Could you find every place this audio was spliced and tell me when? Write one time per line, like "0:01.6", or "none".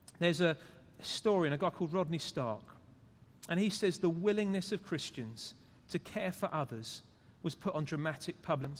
none